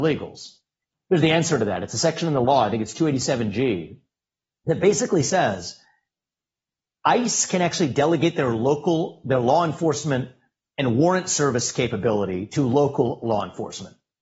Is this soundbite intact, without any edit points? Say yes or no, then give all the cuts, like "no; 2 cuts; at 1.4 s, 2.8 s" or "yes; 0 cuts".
yes; 0 cuts